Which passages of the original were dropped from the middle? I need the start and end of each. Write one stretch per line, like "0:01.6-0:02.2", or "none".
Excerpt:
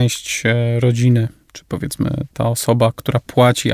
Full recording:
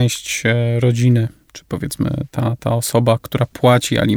0:02.3-0:02.6